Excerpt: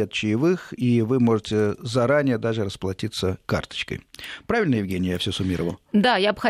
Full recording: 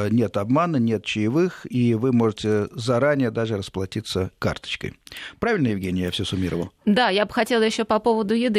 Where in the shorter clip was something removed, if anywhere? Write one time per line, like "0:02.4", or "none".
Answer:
none